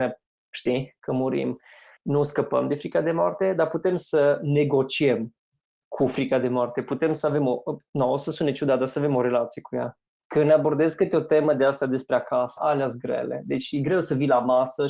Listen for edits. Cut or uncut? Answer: cut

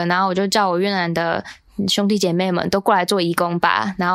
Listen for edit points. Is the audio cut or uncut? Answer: uncut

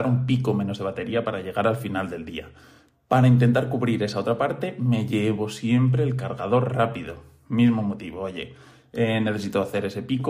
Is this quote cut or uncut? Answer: uncut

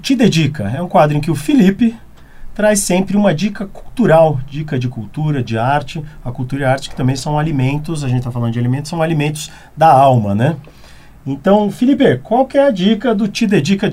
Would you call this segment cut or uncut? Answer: uncut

